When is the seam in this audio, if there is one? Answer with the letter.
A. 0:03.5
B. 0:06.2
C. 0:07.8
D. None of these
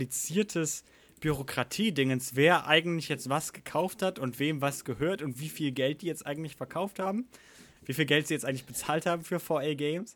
C